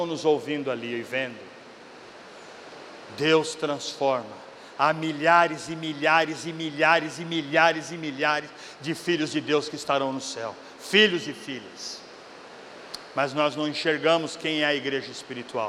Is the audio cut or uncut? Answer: uncut